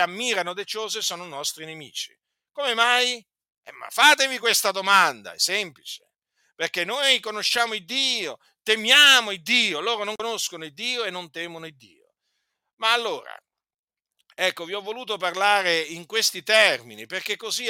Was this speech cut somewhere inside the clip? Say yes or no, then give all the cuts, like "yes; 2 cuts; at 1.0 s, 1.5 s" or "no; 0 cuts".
yes; 1 cut; at 3.5 s